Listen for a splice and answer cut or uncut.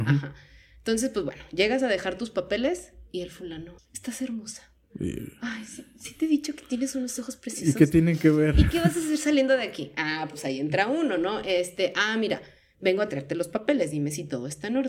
cut